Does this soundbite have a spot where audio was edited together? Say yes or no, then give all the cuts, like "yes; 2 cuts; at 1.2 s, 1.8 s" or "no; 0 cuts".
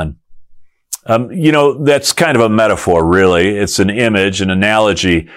no; 0 cuts